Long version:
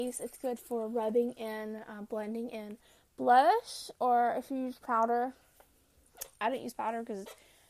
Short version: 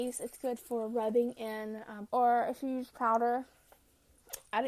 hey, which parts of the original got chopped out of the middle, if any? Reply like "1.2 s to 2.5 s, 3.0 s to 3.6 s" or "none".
2.1 s to 4.0 s